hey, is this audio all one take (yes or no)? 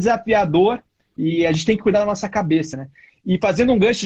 yes